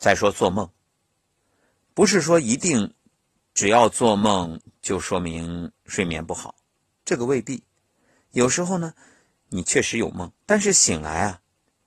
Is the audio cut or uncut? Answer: cut